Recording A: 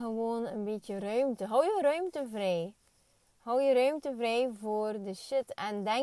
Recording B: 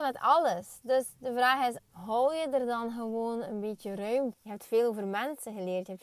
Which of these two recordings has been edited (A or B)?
B